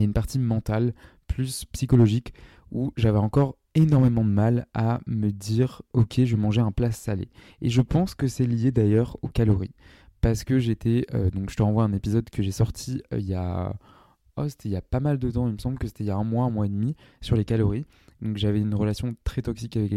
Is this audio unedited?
yes; 0 cuts

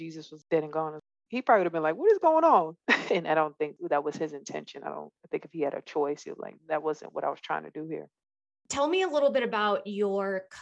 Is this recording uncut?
no; 2 cuts; at 2.8 s, 6.6 s

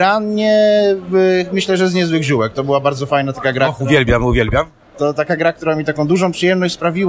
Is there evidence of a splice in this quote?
no; 0 cuts

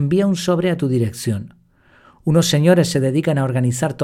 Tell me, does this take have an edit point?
no; 0 cuts

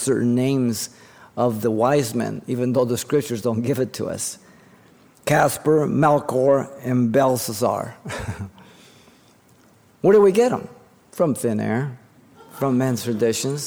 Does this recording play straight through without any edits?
yes; 0 cuts

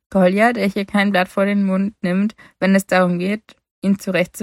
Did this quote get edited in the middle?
no; 0 cuts

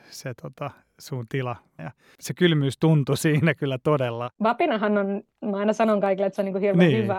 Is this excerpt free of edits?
no; 2 cuts; at 1.8 s, 4.3 s

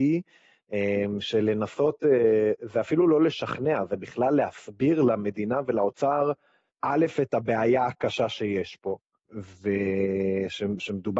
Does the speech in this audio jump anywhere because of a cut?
no; 0 cuts

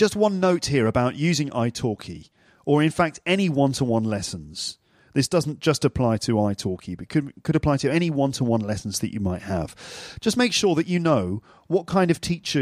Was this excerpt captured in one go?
yes; 0 cuts

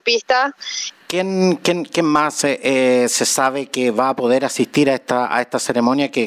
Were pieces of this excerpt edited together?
yes; 1 cut; at 0.9 s

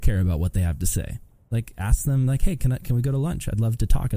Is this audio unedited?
yes; 0 cuts

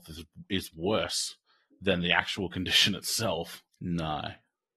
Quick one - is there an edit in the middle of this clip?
yes; 1 cut; at 3.7 s

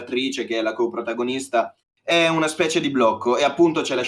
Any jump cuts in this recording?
yes; 1 cut; at 1.8 s

